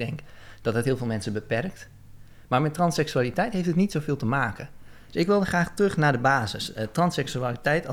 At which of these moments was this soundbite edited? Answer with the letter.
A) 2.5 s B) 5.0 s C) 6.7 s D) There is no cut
D